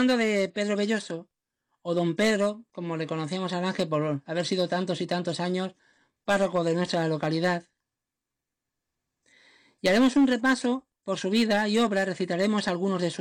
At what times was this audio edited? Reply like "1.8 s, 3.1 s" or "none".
11.0 s

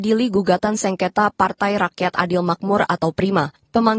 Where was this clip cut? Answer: none

